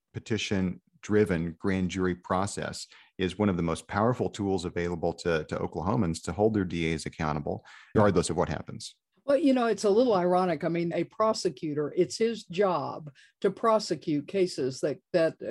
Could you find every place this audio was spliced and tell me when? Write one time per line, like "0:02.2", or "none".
0:07.9
0:09.1
0:10.9